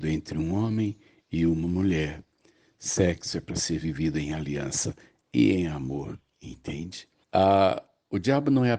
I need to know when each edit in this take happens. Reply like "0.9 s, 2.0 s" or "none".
7.2 s